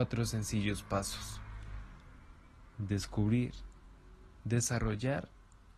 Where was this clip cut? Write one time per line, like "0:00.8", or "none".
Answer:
0:04.4